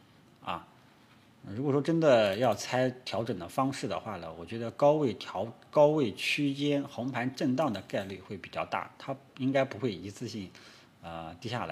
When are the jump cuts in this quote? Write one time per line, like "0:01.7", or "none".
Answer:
none